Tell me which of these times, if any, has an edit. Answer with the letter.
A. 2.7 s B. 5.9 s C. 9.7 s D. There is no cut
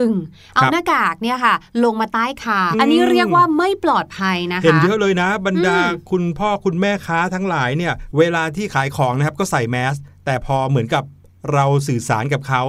A